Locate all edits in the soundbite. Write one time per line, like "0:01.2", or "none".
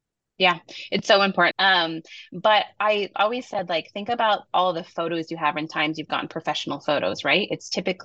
0:01.5